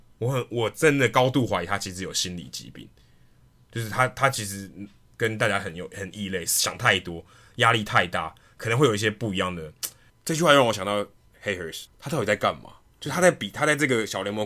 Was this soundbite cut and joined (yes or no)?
yes